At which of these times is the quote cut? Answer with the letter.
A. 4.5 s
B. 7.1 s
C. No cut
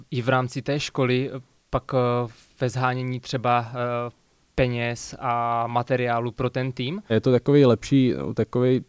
B